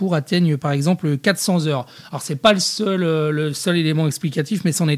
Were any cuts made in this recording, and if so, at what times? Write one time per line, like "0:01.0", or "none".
none